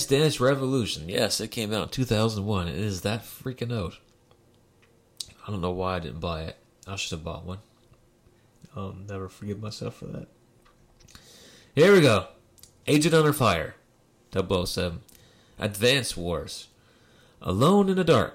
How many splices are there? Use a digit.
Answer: 2